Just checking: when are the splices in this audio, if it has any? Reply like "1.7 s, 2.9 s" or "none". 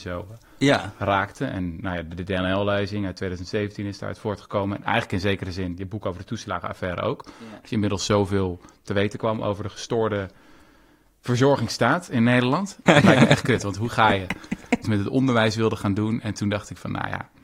12.9 s, 14.8 s